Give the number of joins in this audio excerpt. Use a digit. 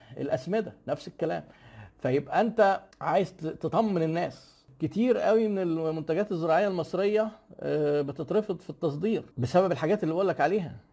2